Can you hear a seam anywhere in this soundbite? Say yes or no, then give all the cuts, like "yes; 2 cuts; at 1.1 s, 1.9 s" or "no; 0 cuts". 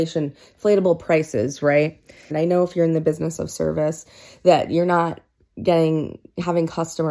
yes; 1 cut; at 2.3 s